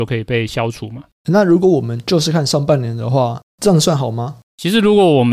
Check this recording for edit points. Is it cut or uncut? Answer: uncut